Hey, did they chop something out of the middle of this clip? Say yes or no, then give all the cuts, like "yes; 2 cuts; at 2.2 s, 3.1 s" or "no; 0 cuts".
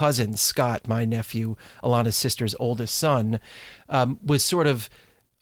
no; 0 cuts